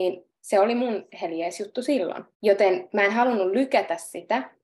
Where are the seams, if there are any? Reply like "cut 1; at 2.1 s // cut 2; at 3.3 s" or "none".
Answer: cut 1; at 2.3 s

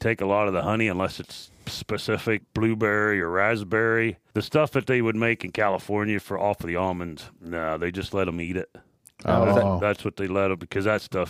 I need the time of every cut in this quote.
cut 1; at 2.4 s // cut 2; at 4.3 s

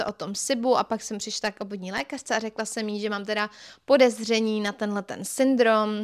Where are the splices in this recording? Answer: none

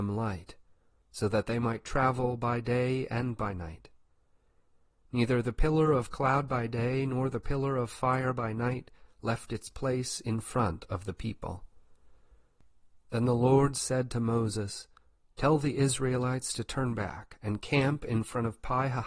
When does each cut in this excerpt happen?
none

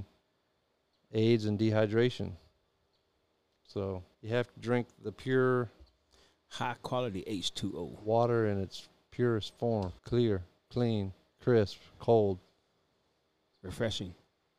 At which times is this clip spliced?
cut 1; at 4.1 s // cut 2; at 10.0 s

